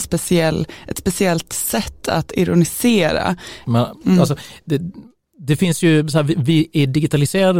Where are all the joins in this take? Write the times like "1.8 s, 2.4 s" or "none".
3.6 s